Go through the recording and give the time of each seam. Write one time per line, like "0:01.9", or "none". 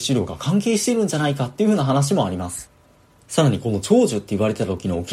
0:03.2